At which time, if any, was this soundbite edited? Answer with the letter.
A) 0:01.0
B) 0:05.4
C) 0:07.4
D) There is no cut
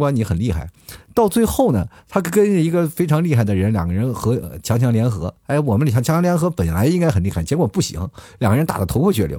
B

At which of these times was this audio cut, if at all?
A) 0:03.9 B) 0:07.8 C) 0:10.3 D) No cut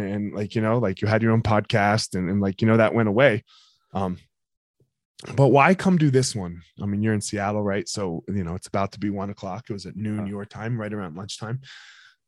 D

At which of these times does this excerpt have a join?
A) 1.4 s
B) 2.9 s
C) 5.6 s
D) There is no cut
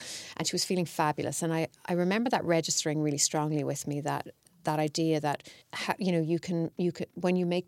C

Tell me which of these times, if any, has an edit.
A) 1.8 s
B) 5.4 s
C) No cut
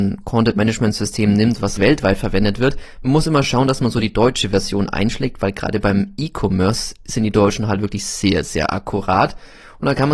A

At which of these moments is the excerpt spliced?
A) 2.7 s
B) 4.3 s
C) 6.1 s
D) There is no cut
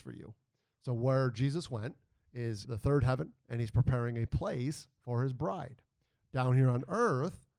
A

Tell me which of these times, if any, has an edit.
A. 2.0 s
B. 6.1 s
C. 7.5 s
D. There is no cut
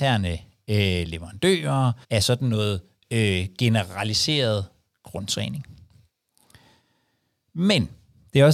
A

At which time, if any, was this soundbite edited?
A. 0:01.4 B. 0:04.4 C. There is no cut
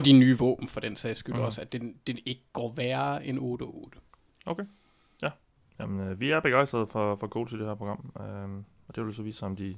C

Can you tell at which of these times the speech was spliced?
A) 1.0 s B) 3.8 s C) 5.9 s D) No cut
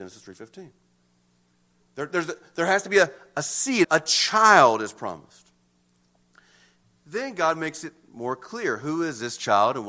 B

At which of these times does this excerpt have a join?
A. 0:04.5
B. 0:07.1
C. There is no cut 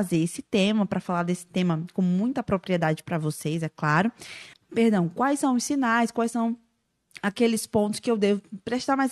A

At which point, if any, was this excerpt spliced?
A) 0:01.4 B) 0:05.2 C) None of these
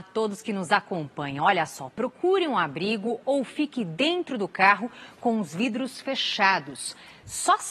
C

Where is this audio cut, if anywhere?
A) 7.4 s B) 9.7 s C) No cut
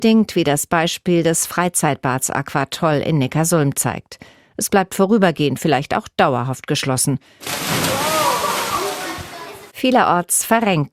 A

